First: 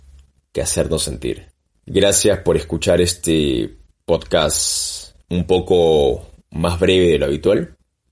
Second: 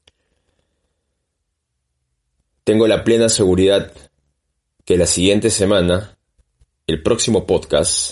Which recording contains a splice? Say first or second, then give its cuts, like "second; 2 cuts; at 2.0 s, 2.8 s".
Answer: first; 2 cuts; at 1.7 s, 5.2 s